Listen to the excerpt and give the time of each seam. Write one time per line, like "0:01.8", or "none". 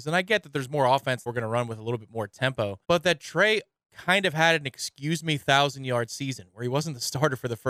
0:01.3
0:02.8